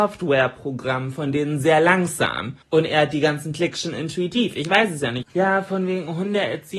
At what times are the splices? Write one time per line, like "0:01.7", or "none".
0:02.6
0:05.2